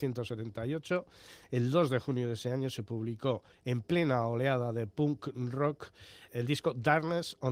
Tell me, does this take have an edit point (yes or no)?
yes